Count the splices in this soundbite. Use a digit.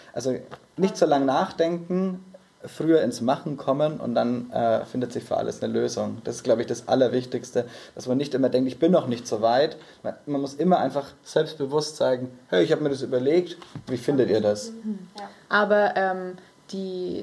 1